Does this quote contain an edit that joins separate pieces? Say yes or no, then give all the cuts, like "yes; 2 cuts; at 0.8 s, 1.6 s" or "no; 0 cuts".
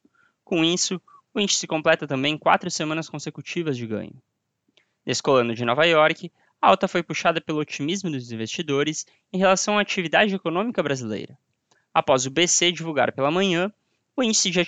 no; 0 cuts